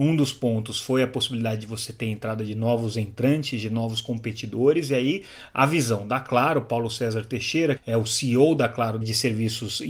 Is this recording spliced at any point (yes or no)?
yes